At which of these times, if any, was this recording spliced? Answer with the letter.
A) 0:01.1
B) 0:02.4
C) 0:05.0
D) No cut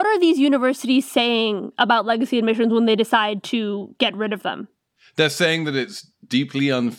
D